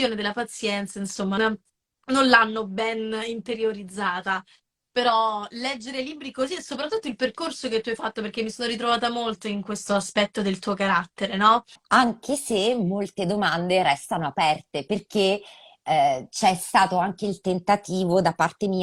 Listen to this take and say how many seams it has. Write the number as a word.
three